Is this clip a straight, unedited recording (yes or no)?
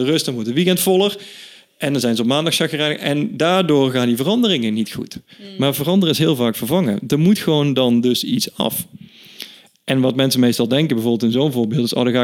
yes